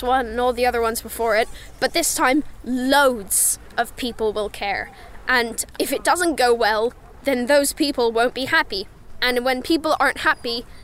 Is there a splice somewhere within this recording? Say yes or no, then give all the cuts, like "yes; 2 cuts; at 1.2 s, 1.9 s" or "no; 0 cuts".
no; 0 cuts